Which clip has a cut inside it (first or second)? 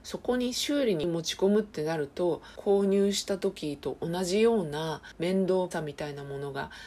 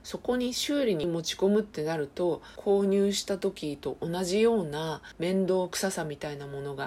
first